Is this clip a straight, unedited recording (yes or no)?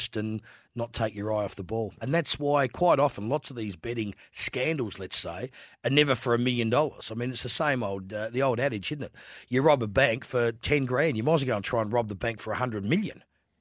no